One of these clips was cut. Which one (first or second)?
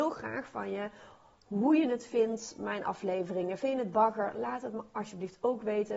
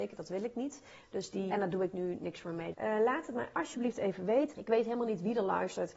second